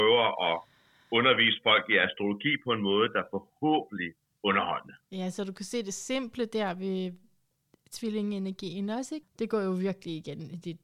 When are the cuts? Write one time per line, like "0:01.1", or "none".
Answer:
0:04.3
0:09.2